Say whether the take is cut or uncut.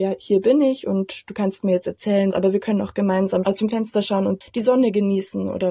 cut